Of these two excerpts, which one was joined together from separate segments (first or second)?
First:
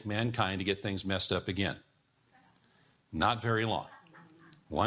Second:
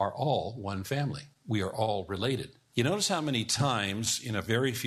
second